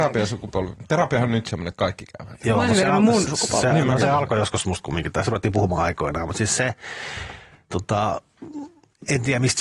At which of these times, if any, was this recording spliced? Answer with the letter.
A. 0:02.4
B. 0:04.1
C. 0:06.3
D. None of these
D